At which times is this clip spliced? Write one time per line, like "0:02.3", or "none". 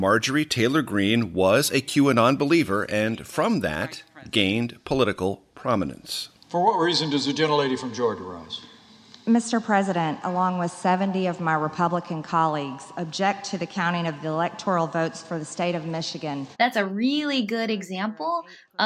0:10.2
0:16.5